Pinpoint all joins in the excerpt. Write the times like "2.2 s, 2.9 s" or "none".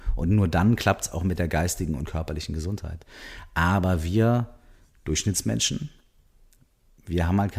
none